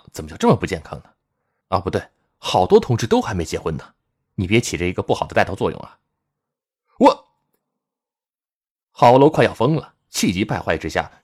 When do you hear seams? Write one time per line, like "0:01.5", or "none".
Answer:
0:01.6